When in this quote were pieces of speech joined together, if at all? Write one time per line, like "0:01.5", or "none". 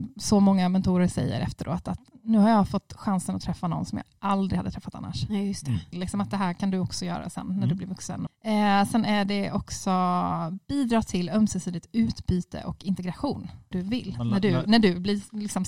0:05.9
0:08.3
0:13.7